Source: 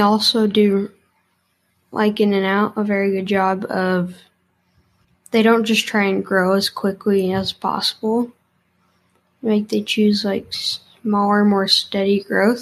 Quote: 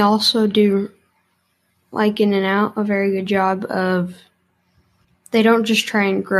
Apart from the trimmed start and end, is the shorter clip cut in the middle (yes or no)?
no